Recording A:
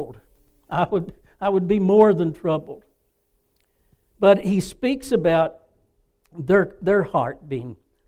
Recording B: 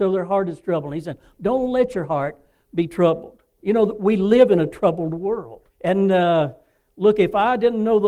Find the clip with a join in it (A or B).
B